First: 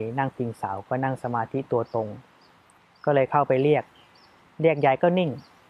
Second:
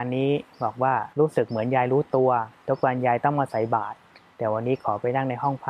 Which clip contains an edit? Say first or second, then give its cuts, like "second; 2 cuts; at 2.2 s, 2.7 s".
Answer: second; 1 cut; at 1.1 s